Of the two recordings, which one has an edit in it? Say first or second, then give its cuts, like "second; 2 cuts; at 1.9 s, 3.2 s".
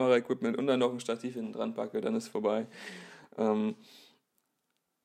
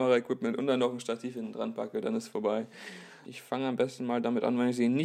second; 1 cut; at 3.2 s